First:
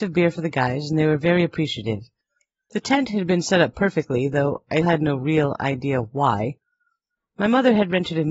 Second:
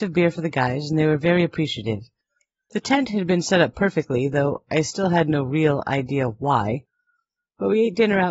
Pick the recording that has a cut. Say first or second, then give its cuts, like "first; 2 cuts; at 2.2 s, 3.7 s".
first; 2 cuts; at 4.8 s, 7.2 s